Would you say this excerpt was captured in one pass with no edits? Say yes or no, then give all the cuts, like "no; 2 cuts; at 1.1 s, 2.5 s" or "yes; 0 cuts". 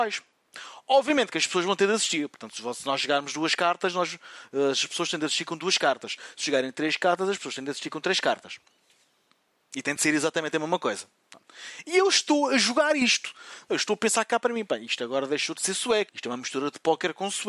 no; 2 cuts; at 11.8 s, 16.1 s